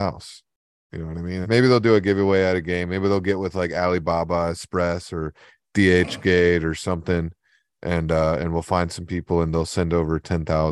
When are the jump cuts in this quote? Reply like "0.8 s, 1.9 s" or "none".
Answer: 1.4 s